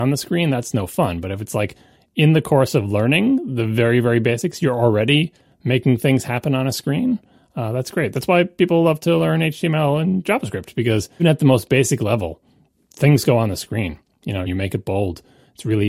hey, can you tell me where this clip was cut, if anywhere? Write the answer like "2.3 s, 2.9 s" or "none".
11.2 s, 14.5 s